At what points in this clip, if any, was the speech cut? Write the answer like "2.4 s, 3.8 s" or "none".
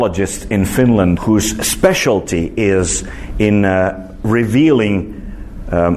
1.2 s